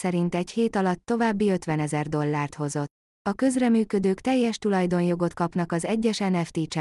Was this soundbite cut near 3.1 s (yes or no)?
yes